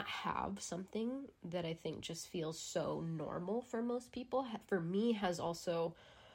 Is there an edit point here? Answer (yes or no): no